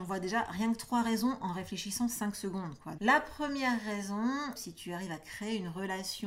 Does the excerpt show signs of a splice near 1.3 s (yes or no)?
no